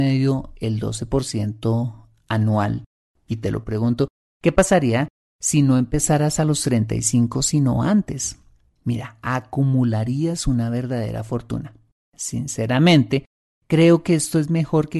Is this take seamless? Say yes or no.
no